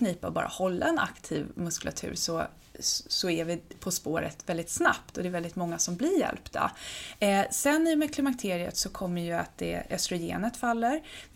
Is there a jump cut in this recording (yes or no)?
no